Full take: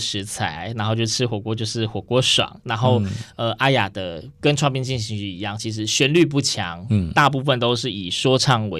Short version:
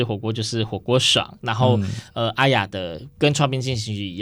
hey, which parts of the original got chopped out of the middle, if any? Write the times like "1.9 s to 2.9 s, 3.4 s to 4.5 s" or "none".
none